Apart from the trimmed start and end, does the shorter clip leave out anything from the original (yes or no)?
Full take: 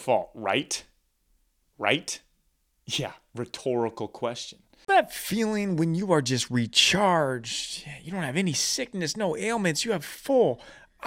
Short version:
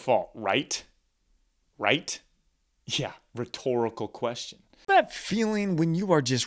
no